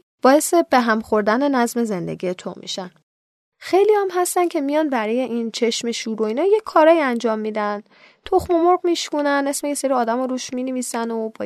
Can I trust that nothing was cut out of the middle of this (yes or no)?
yes